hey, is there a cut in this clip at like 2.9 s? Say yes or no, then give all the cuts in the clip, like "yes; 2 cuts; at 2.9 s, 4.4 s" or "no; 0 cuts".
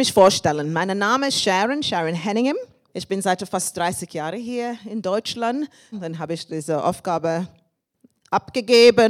yes; 2 cuts; at 2.9 s, 5.9 s